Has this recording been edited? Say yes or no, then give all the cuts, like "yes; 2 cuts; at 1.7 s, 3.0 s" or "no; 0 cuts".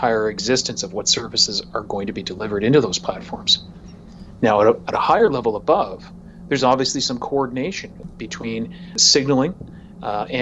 no; 0 cuts